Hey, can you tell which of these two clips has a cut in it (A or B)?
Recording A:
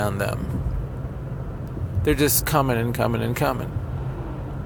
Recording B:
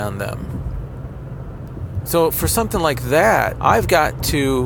B